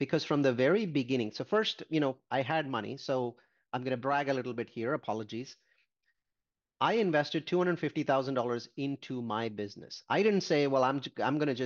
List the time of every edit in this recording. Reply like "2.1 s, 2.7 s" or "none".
none